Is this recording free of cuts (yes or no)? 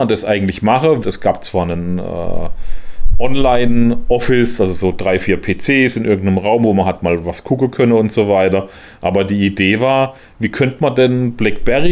no